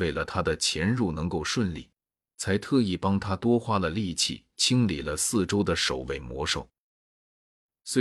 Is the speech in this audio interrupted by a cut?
no; 0 cuts

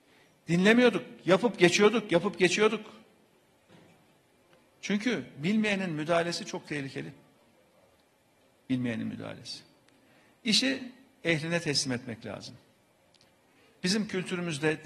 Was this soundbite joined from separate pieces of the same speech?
no; 0 cuts

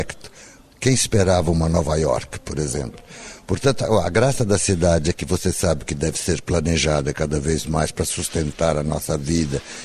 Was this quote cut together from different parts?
no; 0 cuts

